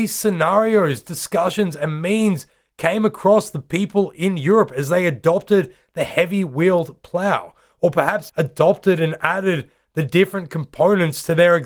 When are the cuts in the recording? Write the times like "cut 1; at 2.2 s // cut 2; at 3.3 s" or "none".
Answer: cut 1; at 8.3 s

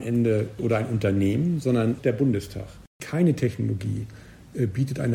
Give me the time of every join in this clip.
cut 1; at 2.9 s

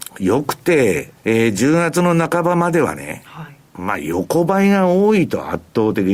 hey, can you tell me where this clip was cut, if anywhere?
cut 1; at 1.2 s

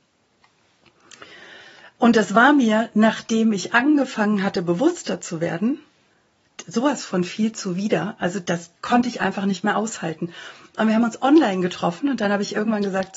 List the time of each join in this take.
cut 1; at 8.4 s

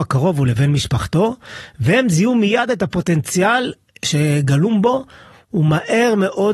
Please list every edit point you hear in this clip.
none

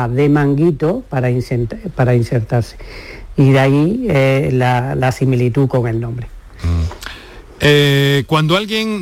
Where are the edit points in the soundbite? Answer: cut 1; at 1.9 s

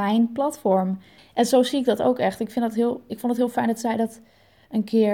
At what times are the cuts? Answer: cut 1; at 1.2 s

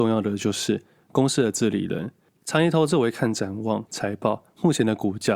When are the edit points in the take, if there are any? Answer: cut 1; at 2.4 s // cut 2; at 3.9 s

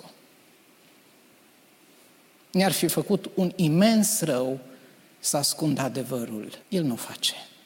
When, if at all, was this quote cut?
cut 1; at 6.6 s

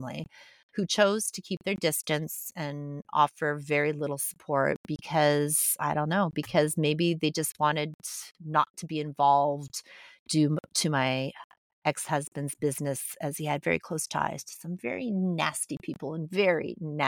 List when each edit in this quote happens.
none

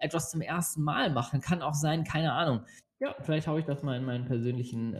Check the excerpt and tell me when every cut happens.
cut 1; at 2.8 s

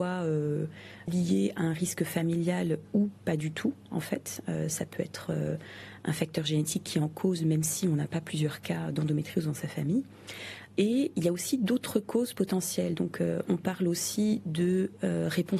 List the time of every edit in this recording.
none

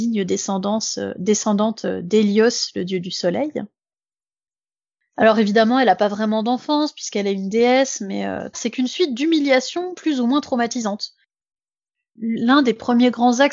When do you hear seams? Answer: cut 1; at 8.5 s // cut 2; at 12.2 s

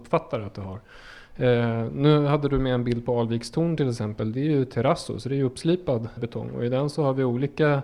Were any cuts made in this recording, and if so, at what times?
cut 1; at 6.2 s

